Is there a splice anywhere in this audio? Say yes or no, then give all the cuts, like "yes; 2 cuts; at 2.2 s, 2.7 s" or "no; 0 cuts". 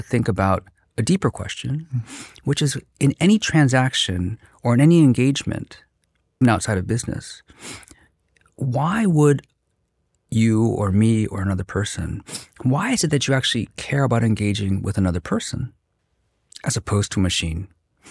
yes; 1 cut; at 6.4 s